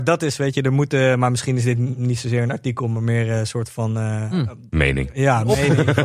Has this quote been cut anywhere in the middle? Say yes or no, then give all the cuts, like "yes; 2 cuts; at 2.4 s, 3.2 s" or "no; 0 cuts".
no; 0 cuts